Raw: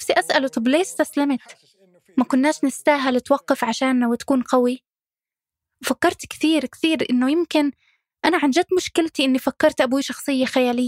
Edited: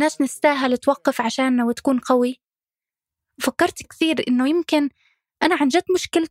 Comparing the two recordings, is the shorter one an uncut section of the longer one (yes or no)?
no